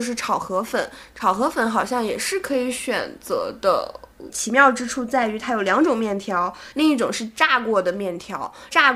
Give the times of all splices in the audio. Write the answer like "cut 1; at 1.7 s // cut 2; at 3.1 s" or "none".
cut 1; at 4.3 s // cut 2; at 6.7 s